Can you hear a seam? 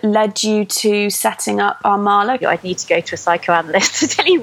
yes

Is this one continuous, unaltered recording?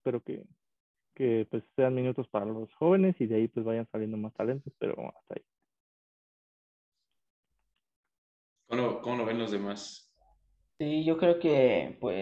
yes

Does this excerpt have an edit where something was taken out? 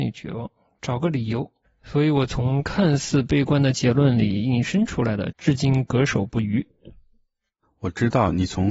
yes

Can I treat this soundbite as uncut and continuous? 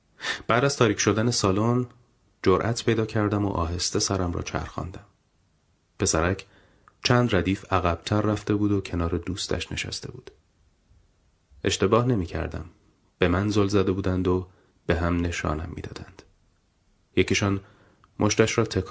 yes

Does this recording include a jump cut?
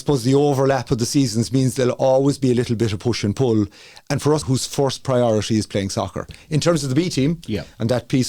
yes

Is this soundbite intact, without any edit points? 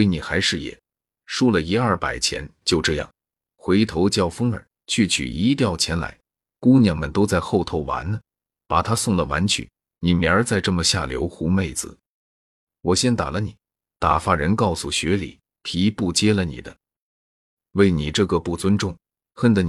yes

